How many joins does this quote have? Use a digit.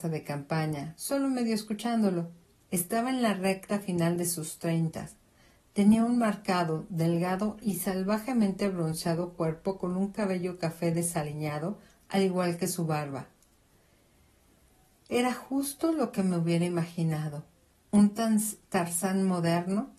1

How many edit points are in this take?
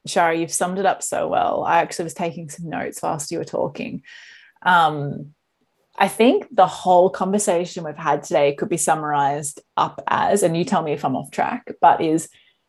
0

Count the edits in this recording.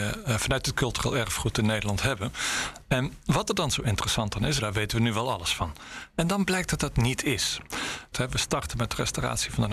2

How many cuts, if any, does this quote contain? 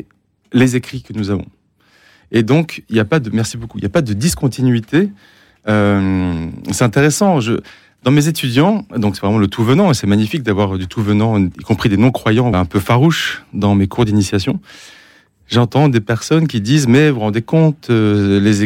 1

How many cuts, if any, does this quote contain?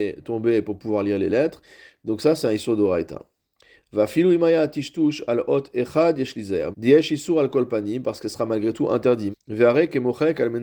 2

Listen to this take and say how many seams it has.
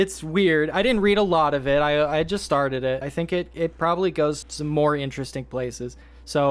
2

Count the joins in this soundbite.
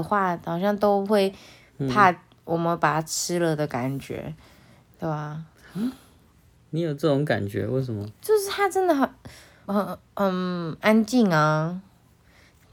1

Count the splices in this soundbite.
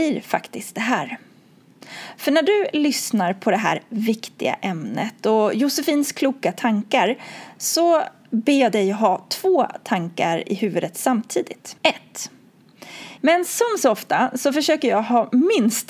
2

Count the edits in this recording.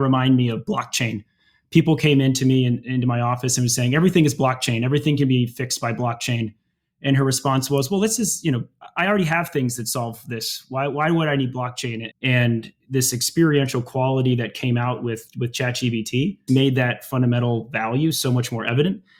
2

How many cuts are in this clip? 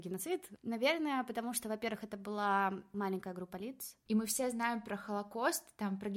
1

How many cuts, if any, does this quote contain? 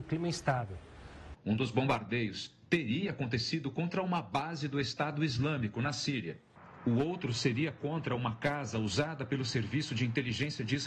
1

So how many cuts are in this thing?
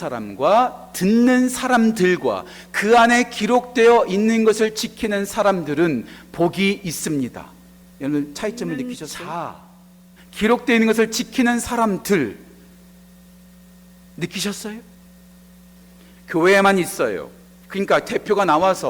2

